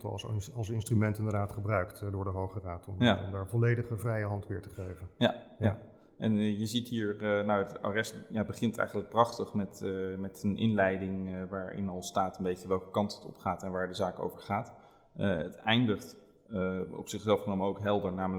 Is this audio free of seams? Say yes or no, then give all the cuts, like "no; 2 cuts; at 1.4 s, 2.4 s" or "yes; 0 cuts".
yes; 0 cuts